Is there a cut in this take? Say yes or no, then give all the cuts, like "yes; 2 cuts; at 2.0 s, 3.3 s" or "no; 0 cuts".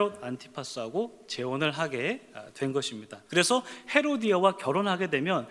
yes; 1 cut; at 3.3 s